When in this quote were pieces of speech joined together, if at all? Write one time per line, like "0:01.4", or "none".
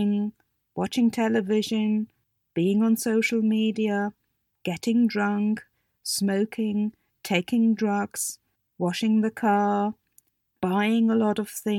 0:04.5